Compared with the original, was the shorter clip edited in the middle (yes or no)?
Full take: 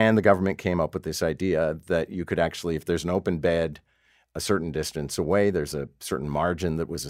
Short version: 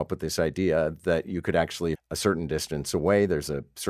yes